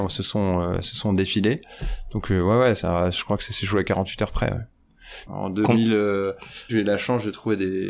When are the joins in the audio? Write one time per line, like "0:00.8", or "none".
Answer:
0:05.3
0:06.7